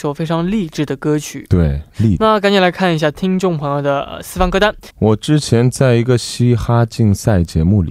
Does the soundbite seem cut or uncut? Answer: cut